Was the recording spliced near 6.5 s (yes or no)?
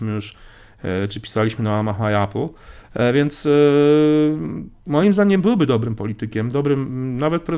no